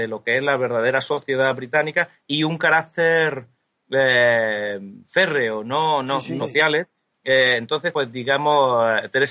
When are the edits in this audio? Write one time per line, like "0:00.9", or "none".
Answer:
0:06.4
0:07.9